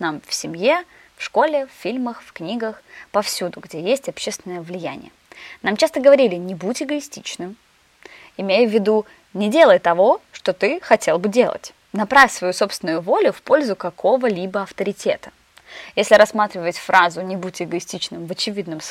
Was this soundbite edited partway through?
no; 0 cuts

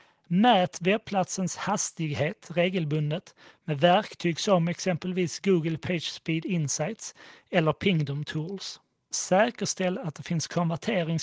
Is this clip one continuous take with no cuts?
no; 1 cut; at 9.1 s

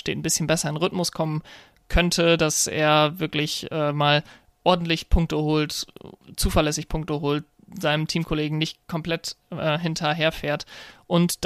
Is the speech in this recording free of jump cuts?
yes; 0 cuts

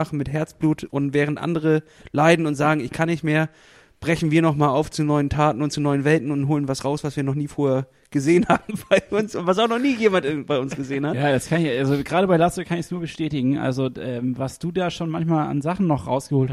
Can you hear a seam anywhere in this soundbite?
no; 0 cuts

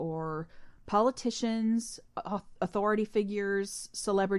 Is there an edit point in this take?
no; 0 cuts

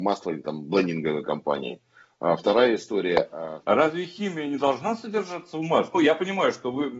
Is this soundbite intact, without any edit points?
no; 2 cuts; at 3.6 s, 5.9 s

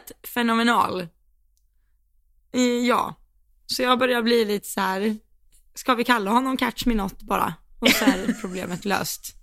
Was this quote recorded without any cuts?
yes; 0 cuts

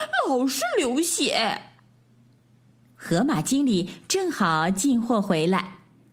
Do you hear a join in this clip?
no; 0 cuts

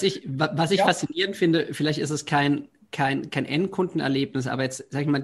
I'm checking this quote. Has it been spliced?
no; 0 cuts

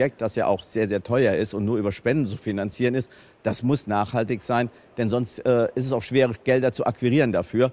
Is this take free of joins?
yes; 0 cuts

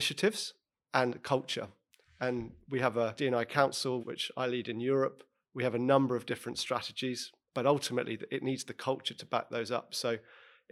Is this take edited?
no; 0 cuts

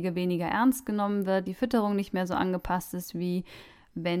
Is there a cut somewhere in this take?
no; 0 cuts

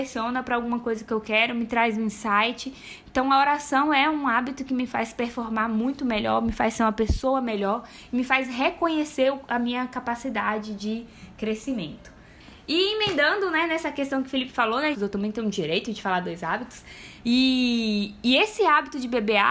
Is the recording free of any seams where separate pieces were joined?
no; 2 cuts; at 14.9 s, 17.2 s

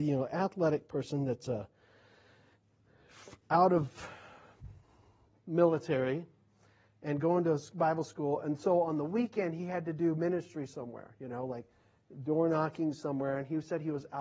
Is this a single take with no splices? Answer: yes; 0 cuts

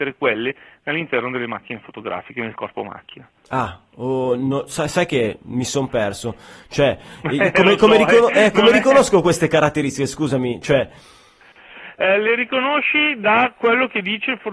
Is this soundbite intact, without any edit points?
no; 1 cut; at 3.4 s

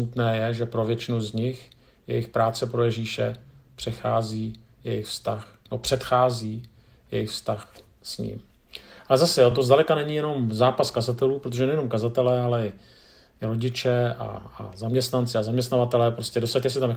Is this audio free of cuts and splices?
yes; 0 cuts

